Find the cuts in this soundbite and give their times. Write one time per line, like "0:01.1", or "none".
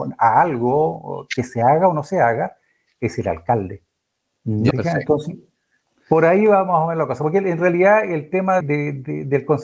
0:04.7
0:08.6